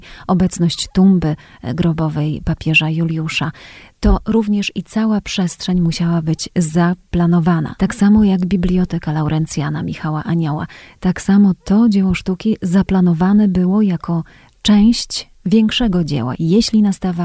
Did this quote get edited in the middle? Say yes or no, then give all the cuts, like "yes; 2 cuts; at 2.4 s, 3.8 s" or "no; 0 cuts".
yes; 2 cuts; at 7.8 s, 16.3 s